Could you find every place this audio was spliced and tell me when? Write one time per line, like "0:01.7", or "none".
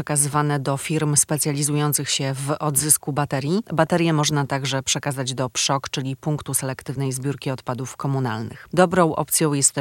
0:03.6
0:08.7